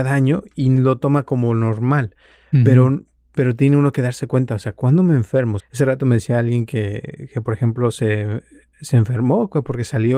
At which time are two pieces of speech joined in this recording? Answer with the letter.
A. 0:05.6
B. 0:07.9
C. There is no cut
A